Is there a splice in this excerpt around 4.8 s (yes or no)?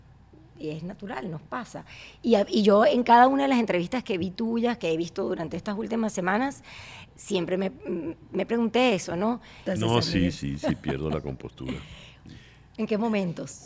no